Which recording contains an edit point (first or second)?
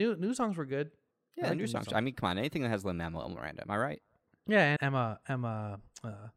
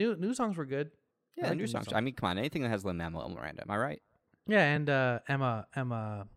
first